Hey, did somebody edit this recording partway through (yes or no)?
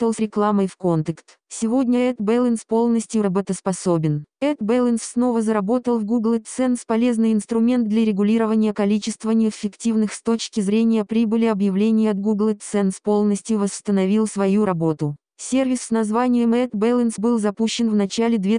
yes